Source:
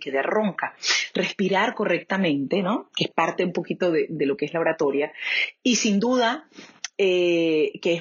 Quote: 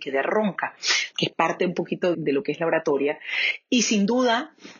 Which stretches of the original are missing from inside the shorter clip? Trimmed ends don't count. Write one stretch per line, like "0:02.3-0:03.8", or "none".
0:01.1-0:02.9
0:03.9-0:04.1

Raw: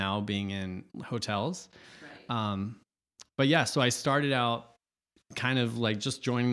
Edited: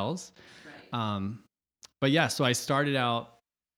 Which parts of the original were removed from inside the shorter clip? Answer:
none

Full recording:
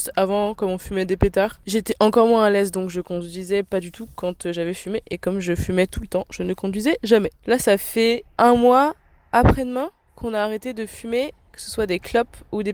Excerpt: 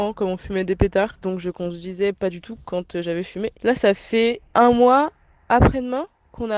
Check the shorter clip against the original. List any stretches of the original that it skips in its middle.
0:01.6-0:02.7
0:05.0-0:07.4

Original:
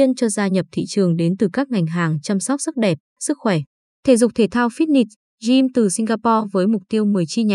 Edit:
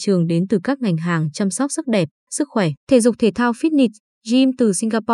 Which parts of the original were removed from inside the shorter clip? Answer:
0:03.7-0:04.0

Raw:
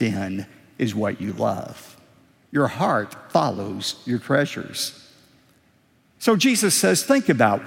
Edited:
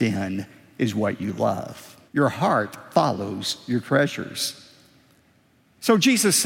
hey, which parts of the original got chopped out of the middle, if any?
0:02.1-0:02.4

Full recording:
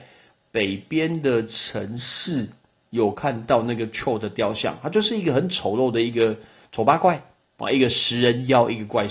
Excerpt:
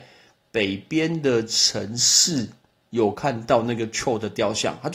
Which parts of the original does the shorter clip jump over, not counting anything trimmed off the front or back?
none

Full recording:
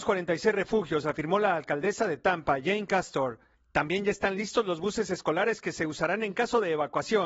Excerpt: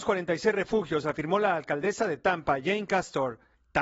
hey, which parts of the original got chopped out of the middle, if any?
none

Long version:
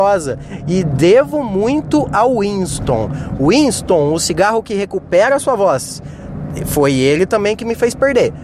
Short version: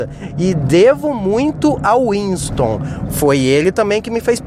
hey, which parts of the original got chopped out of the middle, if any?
0:03.4-0:06.6

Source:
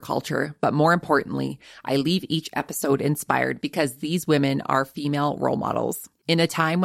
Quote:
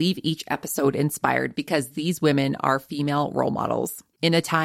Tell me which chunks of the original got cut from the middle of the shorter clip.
none

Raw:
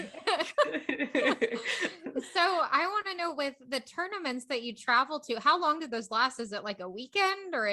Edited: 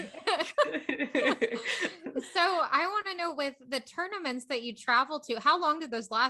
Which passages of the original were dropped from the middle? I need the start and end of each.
none

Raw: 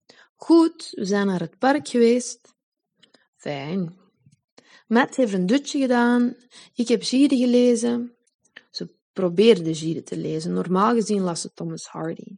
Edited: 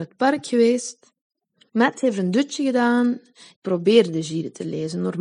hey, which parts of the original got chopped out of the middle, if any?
0:03.1-0:04.8
0:06.7-0:09.1

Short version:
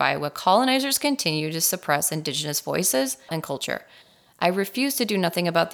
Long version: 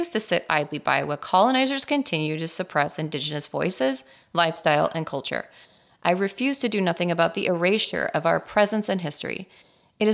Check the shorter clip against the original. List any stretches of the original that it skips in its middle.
0:04.2-0:04.9

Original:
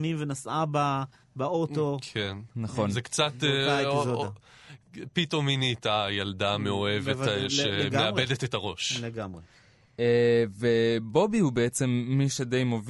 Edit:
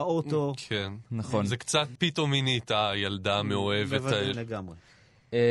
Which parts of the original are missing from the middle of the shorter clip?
0:03.4-0:05.1
0:07.5-0:09.0

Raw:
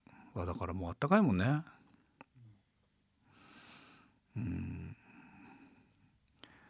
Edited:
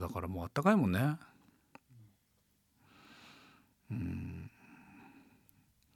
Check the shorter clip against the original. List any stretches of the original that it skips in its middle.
none

